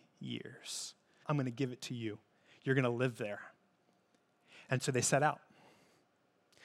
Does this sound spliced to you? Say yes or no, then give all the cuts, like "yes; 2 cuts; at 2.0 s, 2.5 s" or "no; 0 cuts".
yes; 1 cut; at 1.2 s